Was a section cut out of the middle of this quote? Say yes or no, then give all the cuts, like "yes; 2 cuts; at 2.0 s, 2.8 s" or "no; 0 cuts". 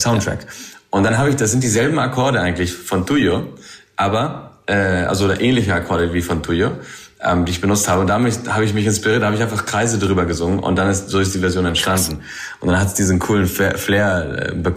no; 0 cuts